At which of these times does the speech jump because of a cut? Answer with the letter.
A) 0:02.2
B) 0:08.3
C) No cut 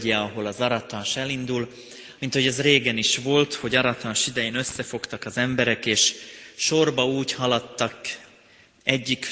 A